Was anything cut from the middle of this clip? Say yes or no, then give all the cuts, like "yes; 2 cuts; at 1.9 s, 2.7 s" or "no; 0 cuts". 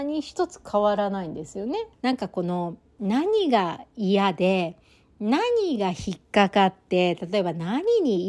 yes; 1 cut; at 1.9 s